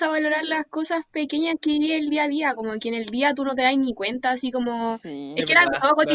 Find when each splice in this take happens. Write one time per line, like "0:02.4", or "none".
none